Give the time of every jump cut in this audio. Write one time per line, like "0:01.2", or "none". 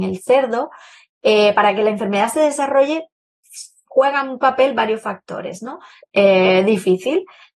0:06.0